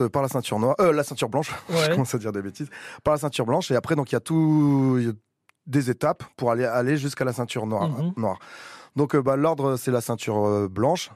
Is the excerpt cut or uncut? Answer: uncut